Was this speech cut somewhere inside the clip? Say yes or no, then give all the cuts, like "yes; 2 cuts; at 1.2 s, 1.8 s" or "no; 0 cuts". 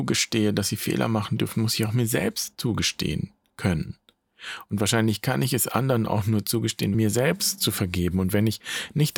yes; 1 cut; at 6.9 s